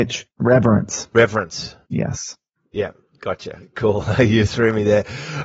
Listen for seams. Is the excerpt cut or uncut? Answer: uncut